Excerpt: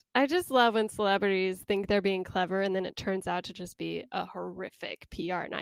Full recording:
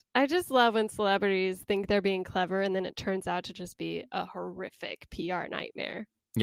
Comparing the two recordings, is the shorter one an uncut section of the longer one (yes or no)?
yes